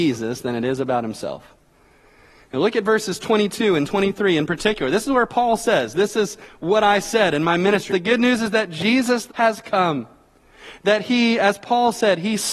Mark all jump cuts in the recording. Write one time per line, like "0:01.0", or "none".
0:07.9
0:09.3